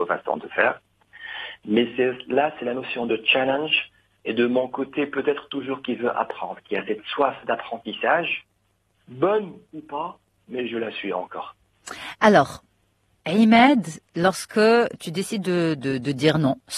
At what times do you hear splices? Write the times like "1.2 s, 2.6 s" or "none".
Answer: 13.2 s, 15.8 s